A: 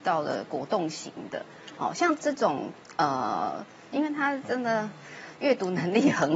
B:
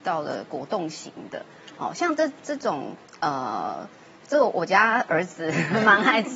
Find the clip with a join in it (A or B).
A